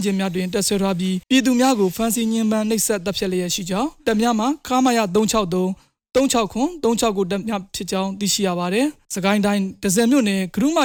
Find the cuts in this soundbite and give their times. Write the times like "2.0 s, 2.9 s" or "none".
1.2 s